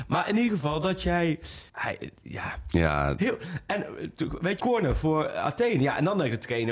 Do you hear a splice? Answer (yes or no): yes